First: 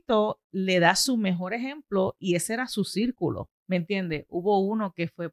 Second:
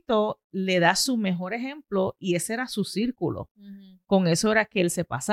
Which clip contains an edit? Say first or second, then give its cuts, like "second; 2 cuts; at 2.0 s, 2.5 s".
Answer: first; 1 cut; at 3.5 s